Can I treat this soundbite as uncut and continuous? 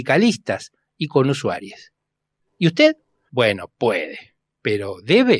no; 1 cut; at 3.3 s

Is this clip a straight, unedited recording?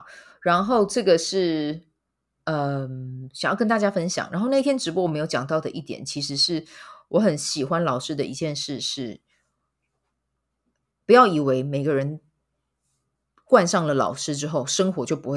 yes; 0 cuts

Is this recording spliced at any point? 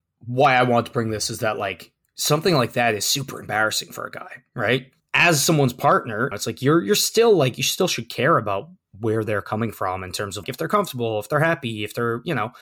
yes; 2 cuts; at 6.3 s, 10.4 s

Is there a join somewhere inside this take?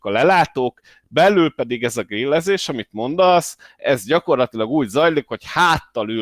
no; 0 cuts

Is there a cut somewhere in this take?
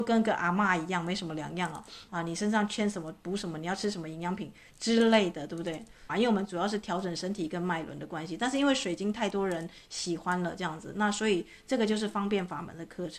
yes; 2 cuts; at 2.1 s, 6.1 s

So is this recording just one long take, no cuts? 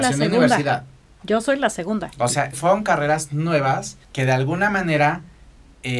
no; 2 cuts; at 2.5 s, 4.0 s

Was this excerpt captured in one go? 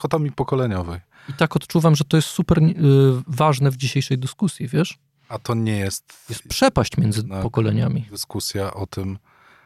yes; 0 cuts

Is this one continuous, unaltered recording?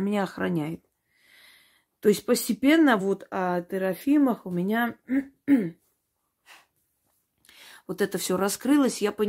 yes; 0 cuts

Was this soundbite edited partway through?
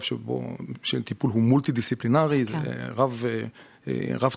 no; 0 cuts

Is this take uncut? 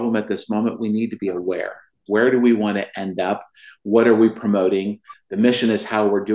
no; 1 cut; at 2.1 s

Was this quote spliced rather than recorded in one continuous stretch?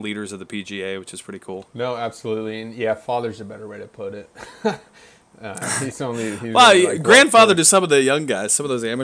no; 0 cuts

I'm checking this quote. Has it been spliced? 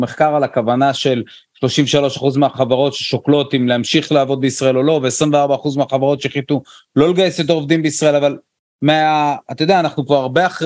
no; 0 cuts

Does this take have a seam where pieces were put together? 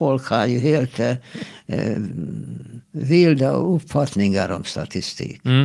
yes; 1 cut; at 2.8 s

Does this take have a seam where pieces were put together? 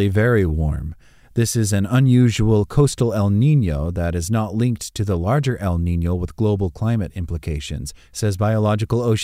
no; 0 cuts

